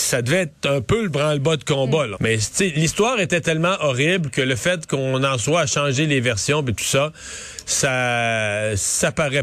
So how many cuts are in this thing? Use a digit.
1